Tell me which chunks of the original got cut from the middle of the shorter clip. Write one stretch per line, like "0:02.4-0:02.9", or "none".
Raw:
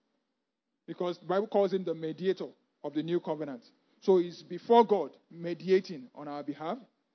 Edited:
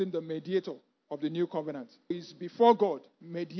0:03.8-0:04.2